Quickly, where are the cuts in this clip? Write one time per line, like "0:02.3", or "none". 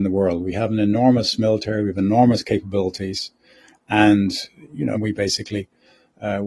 0:04.9